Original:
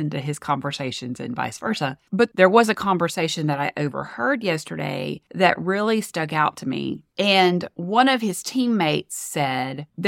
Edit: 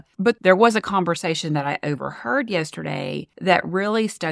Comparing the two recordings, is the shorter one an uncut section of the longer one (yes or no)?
yes